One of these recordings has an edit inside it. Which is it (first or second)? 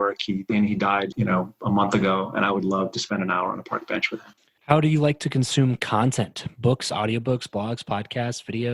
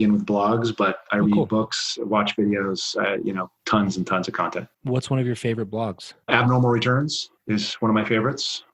first